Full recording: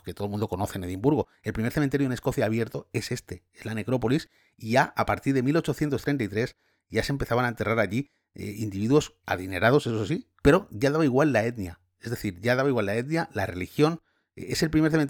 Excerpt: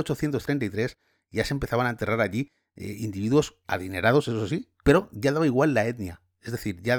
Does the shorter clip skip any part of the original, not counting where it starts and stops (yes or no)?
no